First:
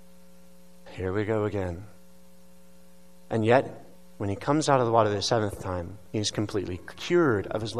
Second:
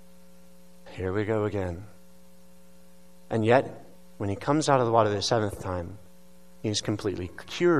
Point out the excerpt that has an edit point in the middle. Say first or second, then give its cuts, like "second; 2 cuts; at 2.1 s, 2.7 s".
first; 1 cut; at 6.1 s